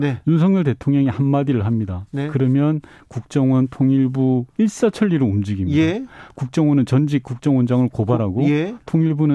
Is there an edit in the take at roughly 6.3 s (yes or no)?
no